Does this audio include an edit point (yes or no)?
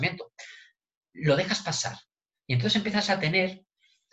no